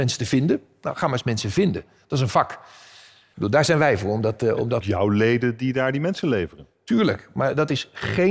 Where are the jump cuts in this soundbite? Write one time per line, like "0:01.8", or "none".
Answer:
0:04.8

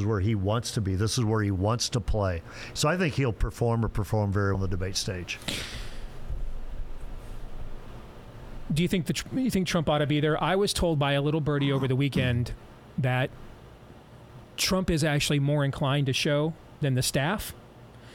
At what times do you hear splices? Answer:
0:02.7
0:04.5

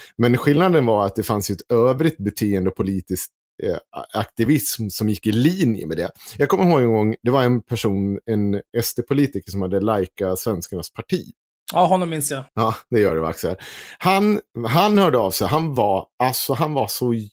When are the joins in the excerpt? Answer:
0:12.5

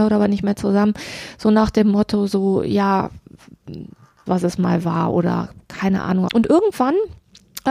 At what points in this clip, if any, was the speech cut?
0:04.3
0:06.3

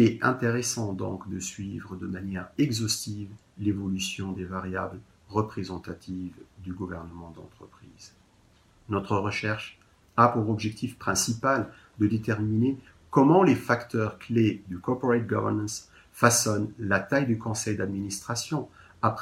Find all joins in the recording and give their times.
none

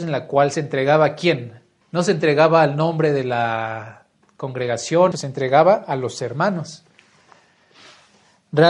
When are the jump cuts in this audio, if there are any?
0:01.8
0:05.1

